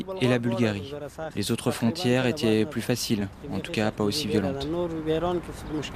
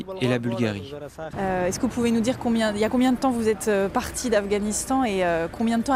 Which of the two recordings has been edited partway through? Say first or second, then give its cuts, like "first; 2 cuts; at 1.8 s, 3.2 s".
second; 1 cut; at 1.3 s